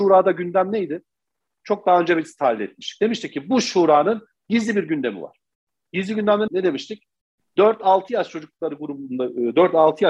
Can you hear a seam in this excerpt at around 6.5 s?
yes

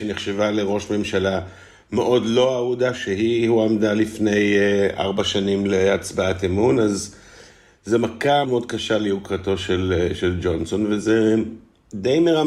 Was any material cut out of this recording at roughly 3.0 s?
no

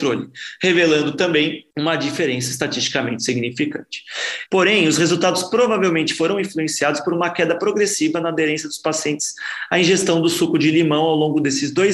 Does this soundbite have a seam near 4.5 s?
yes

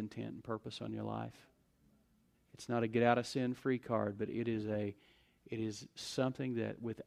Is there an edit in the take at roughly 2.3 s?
yes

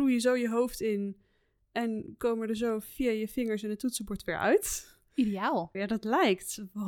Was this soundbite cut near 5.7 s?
yes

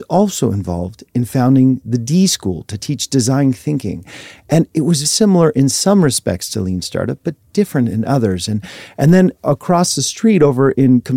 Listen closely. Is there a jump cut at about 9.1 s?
no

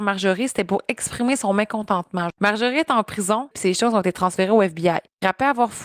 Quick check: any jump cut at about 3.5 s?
yes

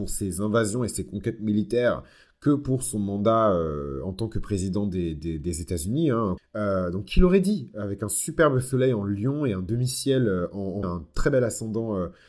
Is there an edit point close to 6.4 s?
yes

